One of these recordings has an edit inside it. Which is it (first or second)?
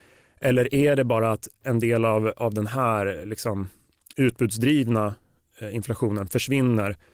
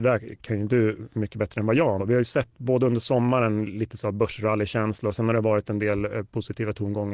second